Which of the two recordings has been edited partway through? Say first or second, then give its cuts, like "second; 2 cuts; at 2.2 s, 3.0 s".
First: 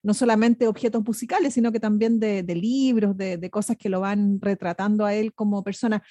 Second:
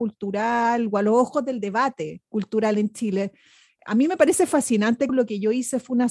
second; 1 cut; at 5.1 s